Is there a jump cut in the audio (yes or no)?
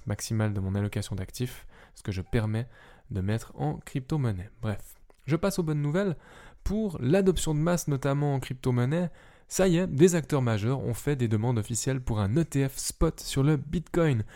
no